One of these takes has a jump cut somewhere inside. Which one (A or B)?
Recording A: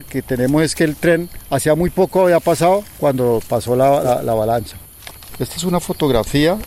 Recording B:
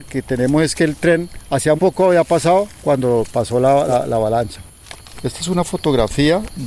B